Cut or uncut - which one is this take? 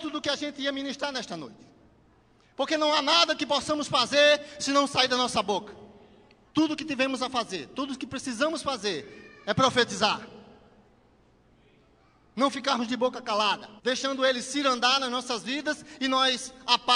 cut